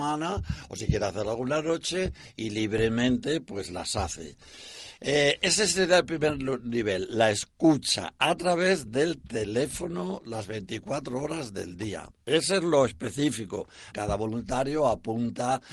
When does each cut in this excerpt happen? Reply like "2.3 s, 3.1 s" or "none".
12.1 s, 13.9 s